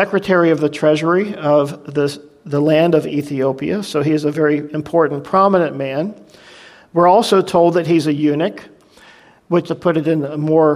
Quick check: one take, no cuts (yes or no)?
no